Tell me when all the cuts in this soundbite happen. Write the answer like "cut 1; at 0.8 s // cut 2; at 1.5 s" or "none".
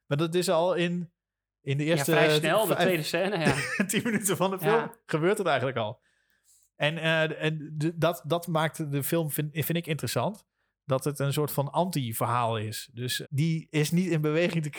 cut 1; at 13.2 s